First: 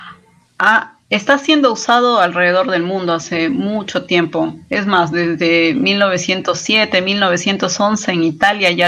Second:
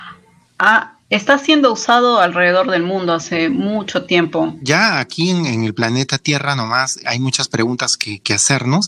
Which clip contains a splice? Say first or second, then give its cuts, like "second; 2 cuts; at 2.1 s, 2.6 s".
second; 2 cuts; at 4.6 s, 7.0 s